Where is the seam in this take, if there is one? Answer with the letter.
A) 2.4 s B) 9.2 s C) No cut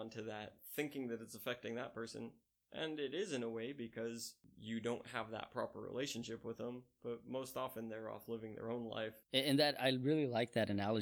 B